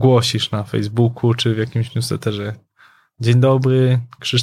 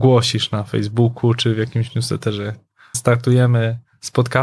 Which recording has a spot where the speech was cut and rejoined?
second; 1 cut; at 2.9 s

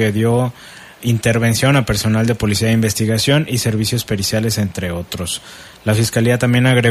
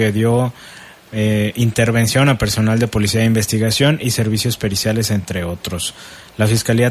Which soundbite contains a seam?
first; 1 cut; at 1.0 s

